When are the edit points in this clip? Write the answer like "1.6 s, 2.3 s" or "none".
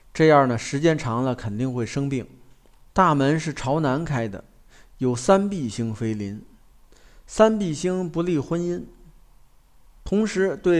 2.8 s